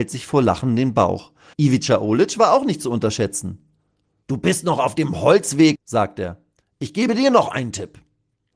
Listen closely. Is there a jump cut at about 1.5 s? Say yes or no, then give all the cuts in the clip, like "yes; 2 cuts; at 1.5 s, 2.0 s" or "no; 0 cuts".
yes; 3 cuts; at 1.5 s, 4.2 s, 5.7 s